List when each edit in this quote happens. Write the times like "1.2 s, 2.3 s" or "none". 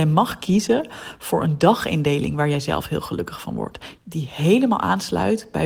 4.0 s